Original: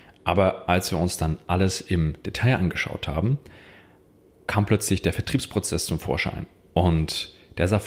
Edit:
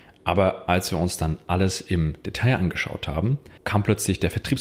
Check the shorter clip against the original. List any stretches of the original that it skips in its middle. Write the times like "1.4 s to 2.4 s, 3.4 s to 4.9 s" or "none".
3.6 s to 4.4 s